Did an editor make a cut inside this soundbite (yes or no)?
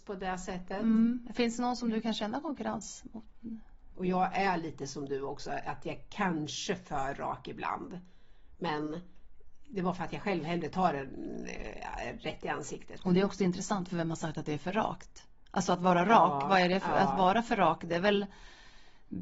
yes